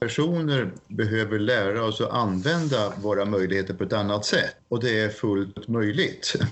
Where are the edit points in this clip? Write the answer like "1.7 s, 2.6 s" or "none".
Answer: none